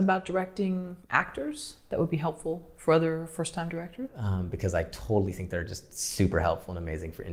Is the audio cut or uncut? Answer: cut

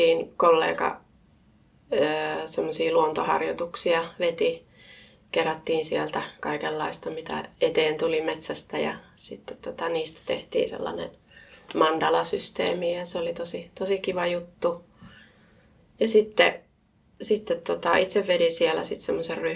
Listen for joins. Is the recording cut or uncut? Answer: uncut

